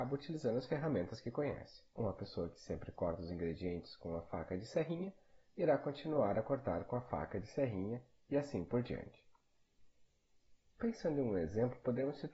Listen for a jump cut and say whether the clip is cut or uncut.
cut